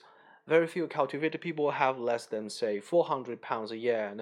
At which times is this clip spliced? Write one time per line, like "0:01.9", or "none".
none